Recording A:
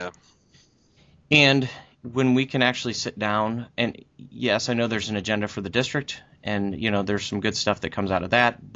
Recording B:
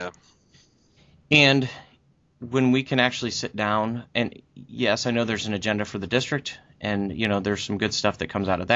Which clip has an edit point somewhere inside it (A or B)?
A